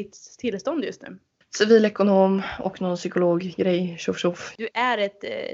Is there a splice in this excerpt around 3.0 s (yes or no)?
no